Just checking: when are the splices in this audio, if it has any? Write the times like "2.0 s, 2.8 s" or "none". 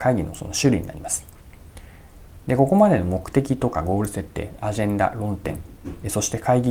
none